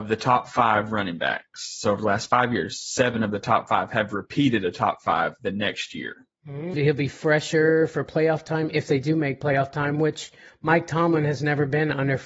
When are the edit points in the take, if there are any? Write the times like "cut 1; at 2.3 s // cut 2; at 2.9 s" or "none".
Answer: cut 1; at 6.7 s